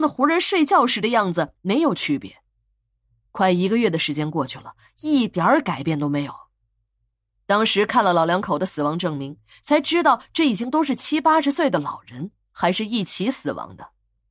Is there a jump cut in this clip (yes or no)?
no